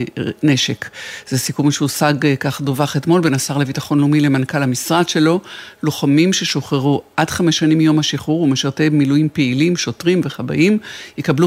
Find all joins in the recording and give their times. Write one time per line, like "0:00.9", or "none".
none